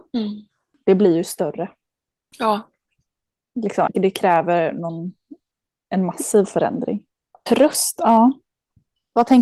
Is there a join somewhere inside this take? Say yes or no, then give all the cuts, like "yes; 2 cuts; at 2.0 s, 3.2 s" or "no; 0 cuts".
yes; 2 cuts; at 3.9 s, 7.5 s